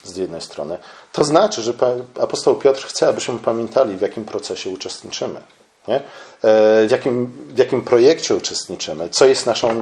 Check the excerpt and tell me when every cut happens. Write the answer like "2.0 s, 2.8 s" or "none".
none